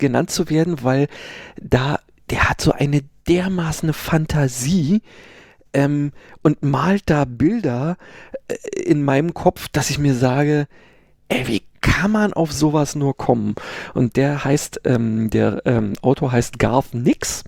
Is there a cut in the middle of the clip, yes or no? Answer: no